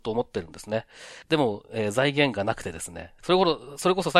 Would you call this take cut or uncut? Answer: cut